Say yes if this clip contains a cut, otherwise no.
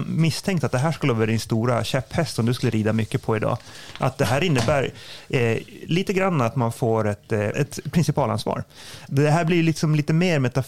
yes